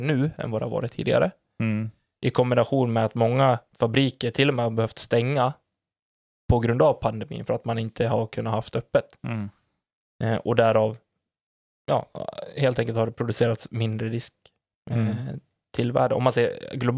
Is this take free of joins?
yes; 0 cuts

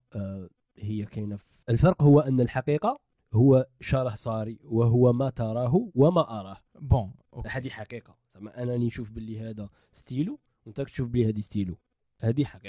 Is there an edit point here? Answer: yes; 2 cuts; at 1.6 s, 6.7 s

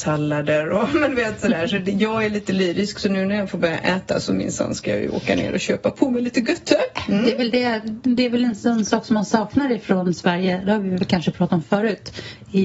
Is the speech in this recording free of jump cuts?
yes; 0 cuts

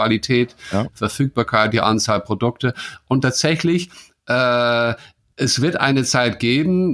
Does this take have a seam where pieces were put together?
no; 0 cuts

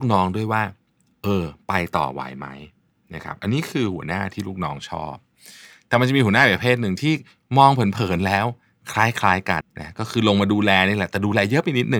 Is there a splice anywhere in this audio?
yes; 1 cut; at 9.6 s

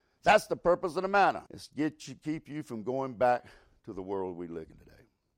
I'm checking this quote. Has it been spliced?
yes; 1 cut; at 1.5 s

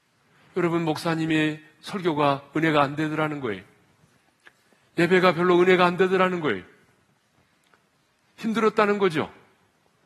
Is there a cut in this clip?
no; 0 cuts

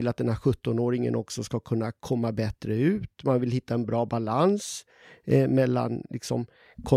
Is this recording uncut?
yes; 0 cuts

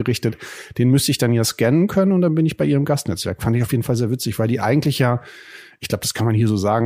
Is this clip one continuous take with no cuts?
yes; 0 cuts

